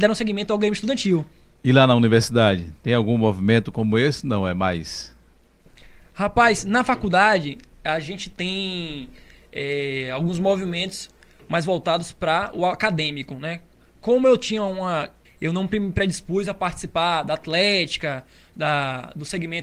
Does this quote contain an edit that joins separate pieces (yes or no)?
yes